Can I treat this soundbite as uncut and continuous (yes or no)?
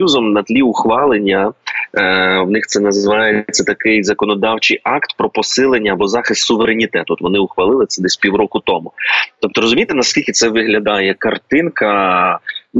yes